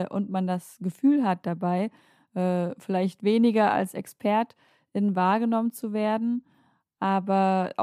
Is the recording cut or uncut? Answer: uncut